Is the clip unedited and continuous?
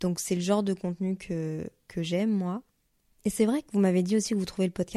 yes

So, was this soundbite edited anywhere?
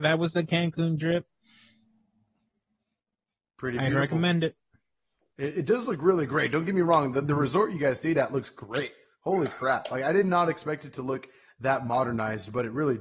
no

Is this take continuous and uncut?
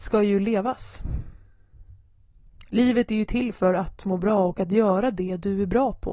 yes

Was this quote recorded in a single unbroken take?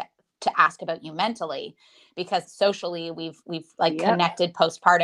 no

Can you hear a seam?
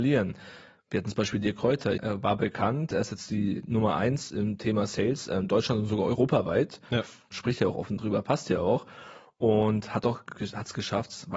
yes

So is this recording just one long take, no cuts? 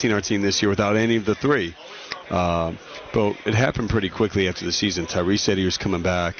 no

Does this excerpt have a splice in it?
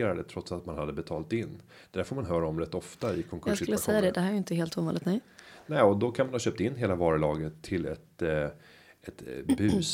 no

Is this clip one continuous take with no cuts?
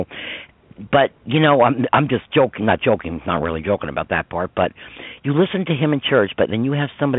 yes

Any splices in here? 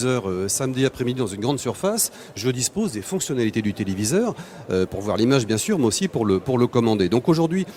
no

